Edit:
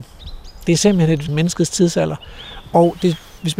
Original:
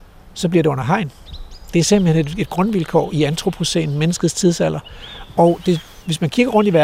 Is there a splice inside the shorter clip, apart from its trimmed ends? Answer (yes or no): yes